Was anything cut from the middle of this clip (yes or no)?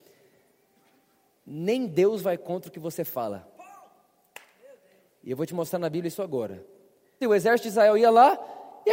yes